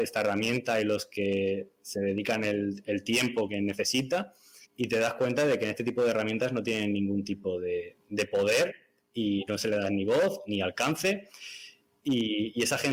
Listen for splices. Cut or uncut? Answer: cut